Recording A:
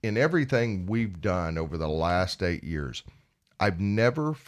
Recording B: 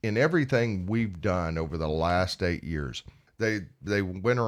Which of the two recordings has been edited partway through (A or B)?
B